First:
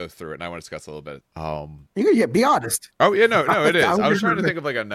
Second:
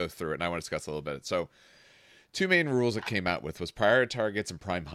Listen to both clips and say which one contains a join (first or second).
first